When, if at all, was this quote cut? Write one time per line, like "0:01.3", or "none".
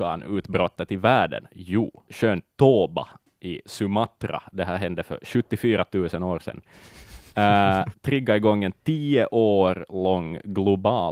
0:02.1
0:07.9